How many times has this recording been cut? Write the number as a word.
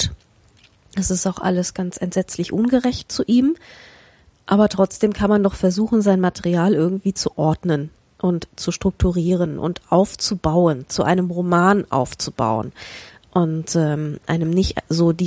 zero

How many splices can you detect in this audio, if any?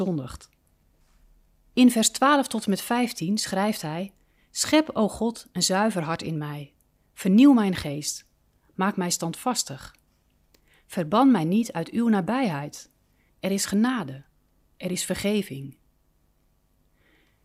one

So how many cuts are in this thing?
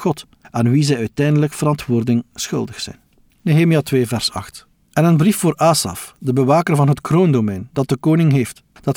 one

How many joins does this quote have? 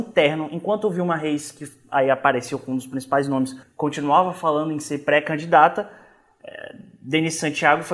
one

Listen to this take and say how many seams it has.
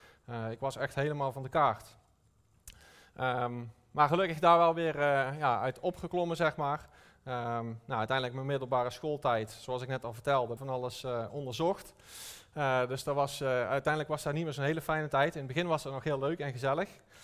one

